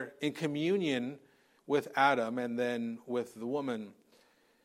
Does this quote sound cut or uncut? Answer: cut